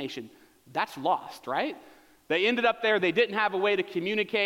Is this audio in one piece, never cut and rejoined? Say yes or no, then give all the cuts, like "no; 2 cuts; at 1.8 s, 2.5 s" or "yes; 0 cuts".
yes; 0 cuts